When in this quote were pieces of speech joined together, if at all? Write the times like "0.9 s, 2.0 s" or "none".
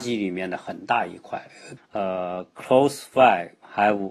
1.8 s